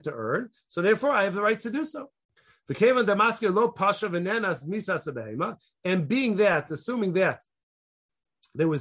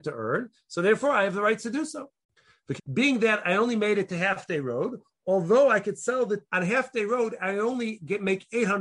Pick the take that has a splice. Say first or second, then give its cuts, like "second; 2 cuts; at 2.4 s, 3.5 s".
second; 2 cuts; at 2.8 s, 6.4 s